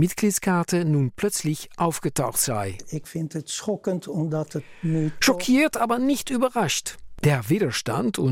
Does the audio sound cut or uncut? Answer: cut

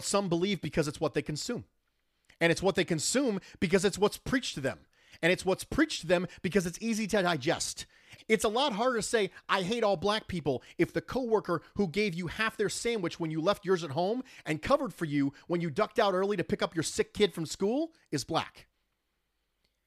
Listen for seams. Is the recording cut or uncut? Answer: cut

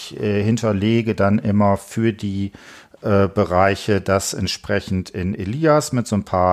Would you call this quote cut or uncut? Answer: uncut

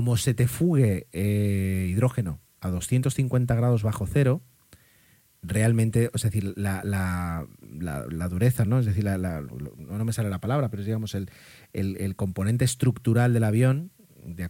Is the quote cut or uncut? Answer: uncut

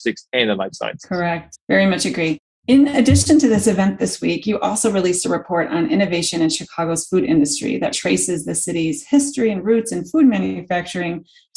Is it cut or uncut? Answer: cut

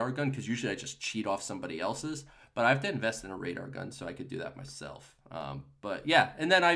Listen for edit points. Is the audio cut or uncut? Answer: uncut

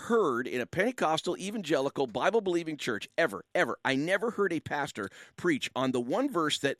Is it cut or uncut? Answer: uncut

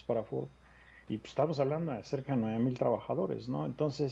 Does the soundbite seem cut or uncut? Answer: cut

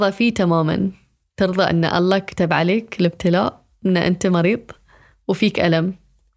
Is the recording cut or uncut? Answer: uncut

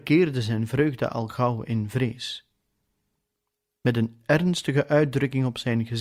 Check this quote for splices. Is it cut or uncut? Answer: uncut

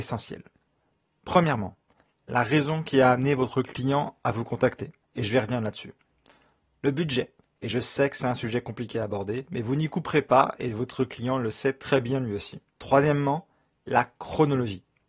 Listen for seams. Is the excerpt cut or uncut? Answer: cut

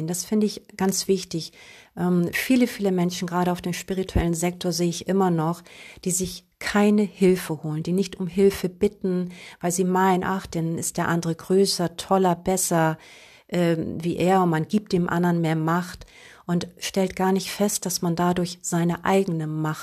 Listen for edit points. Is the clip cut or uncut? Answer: uncut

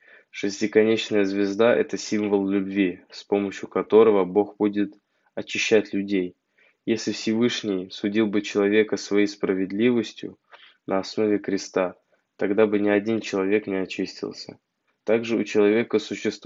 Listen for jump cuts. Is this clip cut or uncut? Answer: cut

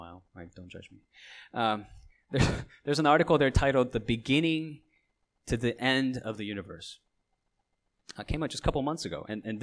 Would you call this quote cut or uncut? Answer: uncut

